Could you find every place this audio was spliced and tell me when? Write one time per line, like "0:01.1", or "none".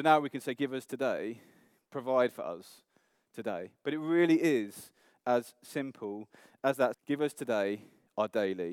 0:06.9